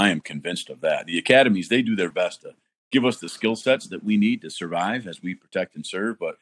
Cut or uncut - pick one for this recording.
cut